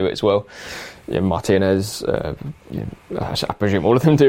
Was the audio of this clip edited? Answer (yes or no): no